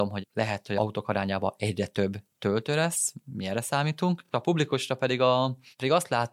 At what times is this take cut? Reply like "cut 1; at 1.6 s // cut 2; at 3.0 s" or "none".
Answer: none